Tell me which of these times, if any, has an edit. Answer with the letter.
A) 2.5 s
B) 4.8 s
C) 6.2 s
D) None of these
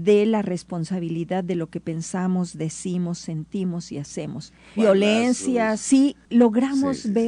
B